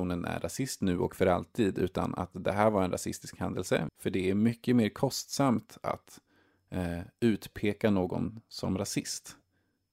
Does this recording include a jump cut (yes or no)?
yes